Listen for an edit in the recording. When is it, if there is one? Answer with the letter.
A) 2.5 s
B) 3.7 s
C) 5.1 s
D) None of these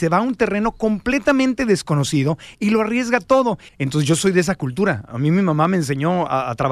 B